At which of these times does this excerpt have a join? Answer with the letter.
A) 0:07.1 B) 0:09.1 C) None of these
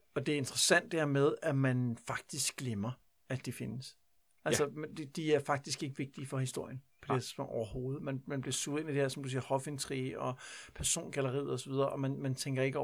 C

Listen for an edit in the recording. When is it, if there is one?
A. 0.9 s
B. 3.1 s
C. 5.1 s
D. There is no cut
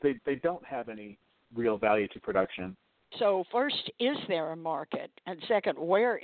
B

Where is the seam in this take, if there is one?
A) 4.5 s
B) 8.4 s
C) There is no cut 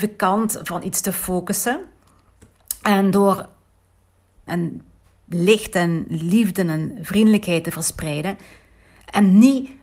A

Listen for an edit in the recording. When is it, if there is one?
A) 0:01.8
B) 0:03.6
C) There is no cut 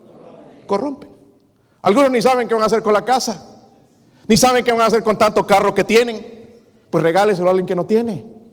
C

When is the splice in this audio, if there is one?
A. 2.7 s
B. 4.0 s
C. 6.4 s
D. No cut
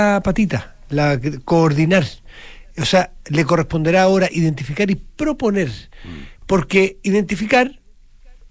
D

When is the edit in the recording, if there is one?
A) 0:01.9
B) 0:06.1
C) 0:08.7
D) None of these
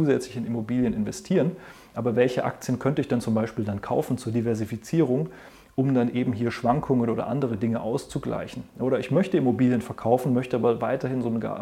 D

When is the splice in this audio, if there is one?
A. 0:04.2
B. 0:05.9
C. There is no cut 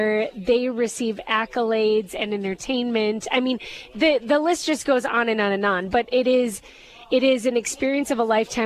C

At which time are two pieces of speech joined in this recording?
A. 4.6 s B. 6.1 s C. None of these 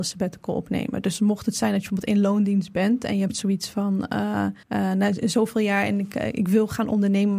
A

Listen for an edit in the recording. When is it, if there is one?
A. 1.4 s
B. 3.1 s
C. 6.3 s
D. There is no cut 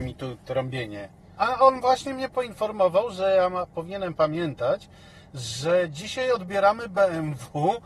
A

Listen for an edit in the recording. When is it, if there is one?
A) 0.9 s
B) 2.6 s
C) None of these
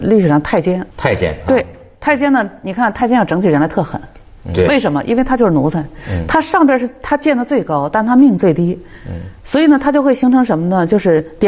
A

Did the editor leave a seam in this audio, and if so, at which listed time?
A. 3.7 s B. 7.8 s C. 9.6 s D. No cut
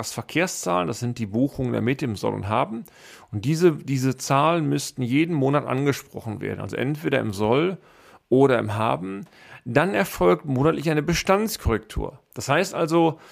D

